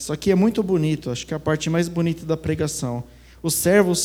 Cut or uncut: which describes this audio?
uncut